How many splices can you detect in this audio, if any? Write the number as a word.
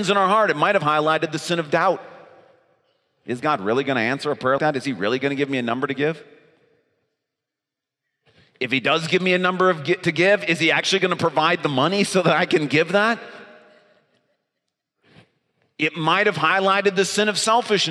one